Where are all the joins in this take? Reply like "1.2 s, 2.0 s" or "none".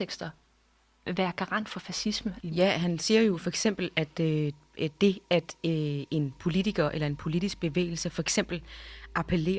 2.4 s